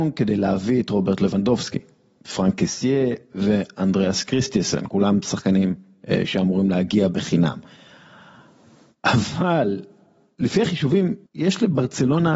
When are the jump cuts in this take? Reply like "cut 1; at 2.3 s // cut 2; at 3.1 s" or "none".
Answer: cut 1; at 11.3 s